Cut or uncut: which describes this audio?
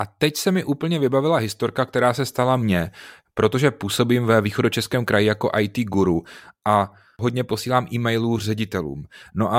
uncut